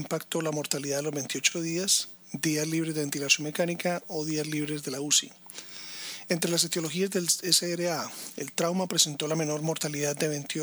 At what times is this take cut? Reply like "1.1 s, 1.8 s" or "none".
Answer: none